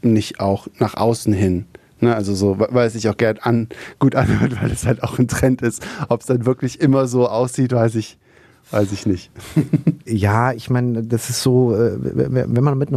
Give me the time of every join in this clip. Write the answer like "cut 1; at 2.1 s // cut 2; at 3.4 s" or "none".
none